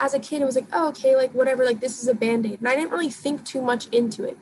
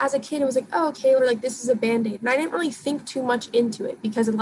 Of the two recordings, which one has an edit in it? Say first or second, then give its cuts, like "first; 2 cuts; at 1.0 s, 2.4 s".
second; 1 cut; at 1.2 s